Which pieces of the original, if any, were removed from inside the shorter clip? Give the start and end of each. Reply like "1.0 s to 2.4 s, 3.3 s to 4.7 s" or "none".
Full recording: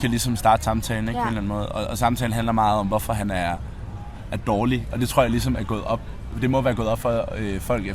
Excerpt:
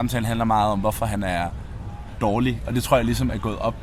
4.2 s to 4.4 s